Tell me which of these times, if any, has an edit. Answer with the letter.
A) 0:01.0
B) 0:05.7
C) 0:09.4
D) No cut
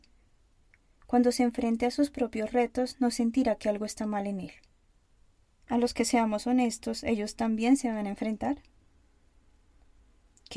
B